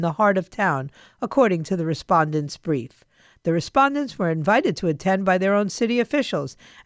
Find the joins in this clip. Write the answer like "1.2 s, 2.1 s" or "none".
none